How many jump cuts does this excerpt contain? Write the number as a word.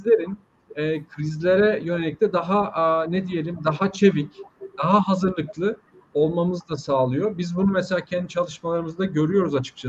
zero